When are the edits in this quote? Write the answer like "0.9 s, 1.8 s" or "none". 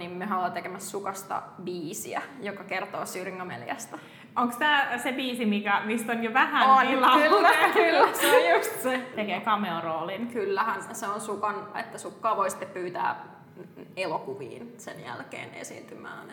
9.1 s, 11.7 s